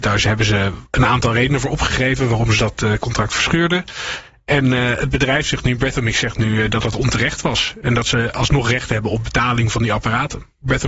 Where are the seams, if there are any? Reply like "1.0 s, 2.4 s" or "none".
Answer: none